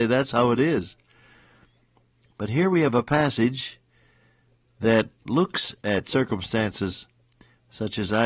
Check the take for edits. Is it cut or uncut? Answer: cut